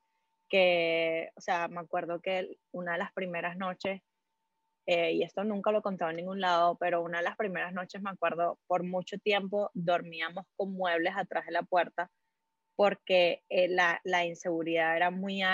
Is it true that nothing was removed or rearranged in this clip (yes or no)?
yes